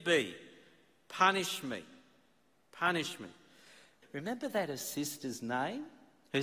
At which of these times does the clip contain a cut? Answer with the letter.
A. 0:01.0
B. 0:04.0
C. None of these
B